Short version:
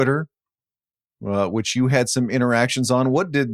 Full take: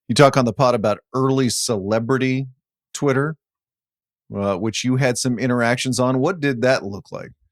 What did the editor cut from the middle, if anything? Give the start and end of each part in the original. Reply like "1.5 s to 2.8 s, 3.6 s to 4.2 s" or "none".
none